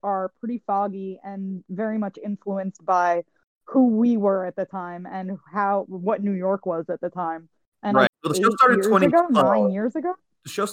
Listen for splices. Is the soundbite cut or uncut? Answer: cut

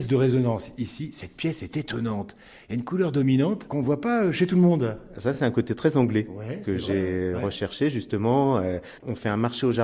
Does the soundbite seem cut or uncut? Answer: uncut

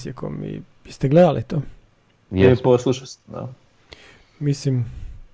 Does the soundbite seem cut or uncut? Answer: uncut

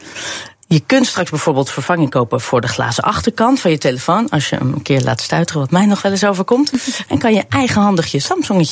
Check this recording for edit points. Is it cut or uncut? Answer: cut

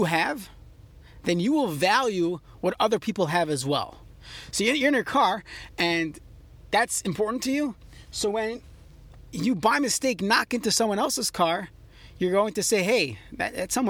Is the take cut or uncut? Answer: cut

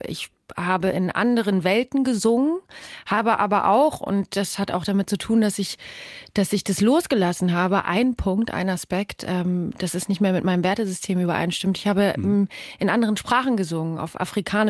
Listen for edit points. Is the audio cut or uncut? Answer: uncut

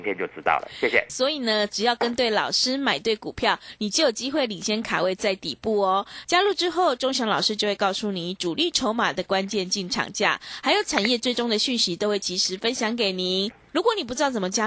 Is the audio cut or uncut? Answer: cut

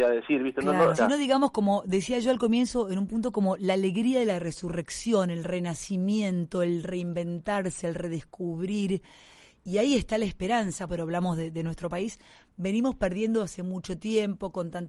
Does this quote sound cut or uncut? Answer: cut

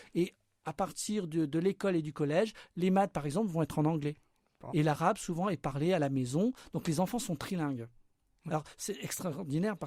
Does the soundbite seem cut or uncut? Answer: cut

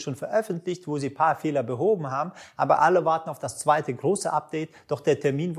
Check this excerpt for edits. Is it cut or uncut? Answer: uncut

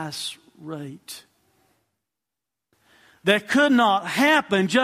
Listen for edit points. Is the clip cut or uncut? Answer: uncut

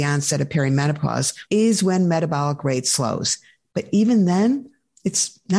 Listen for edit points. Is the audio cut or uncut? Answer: cut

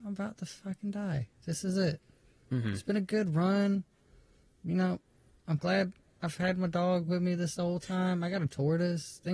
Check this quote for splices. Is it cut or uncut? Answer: uncut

